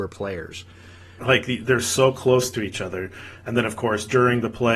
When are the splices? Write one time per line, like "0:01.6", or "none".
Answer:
0:01.2